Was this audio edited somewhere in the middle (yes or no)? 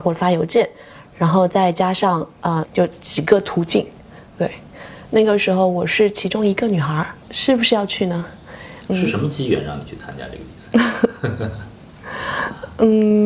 yes